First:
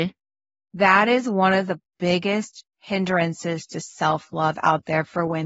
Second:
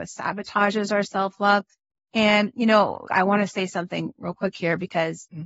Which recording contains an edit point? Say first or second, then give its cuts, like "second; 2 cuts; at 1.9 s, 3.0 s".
second; 2 cuts; at 1.9 s, 3.0 s